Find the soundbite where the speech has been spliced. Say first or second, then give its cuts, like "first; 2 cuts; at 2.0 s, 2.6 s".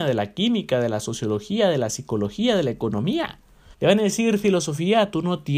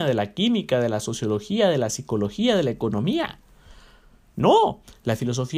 first; 1 cut; at 3.7 s